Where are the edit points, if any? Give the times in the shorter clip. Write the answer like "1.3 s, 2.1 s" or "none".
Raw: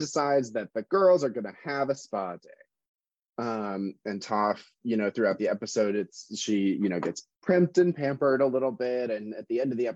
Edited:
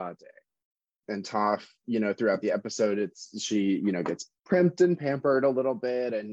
1.0 s